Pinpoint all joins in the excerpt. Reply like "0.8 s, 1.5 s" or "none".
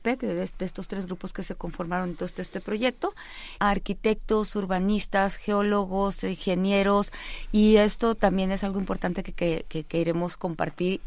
3.6 s

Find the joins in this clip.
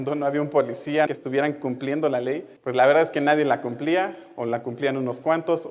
1.1 s, 2.6 s

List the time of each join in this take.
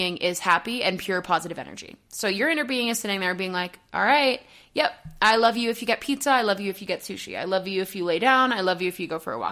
none

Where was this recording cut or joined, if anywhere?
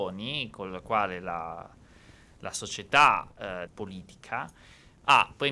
3.7 s

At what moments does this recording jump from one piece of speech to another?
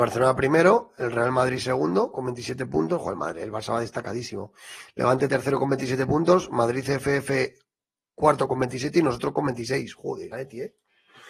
10.3 s

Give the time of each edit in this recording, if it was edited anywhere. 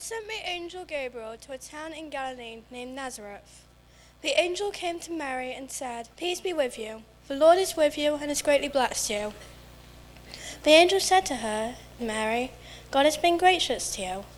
6.1 s, 10.6 s, 12.0 s

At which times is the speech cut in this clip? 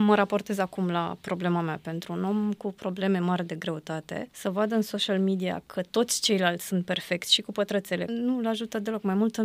4.3 s, 8.1 s

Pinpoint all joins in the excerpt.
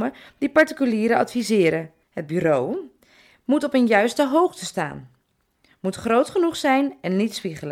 2.0 s

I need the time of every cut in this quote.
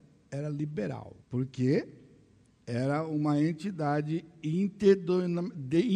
1.2 s

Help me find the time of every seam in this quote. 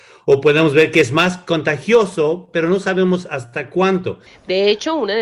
4.3 s

